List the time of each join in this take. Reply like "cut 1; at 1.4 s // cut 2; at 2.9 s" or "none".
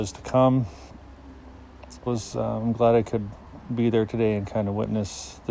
cut 1; at 2.1 s